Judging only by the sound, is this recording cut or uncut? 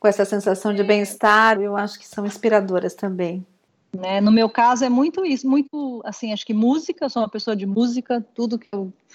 cut